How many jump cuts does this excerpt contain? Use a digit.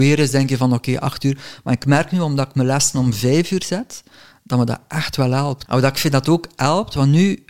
1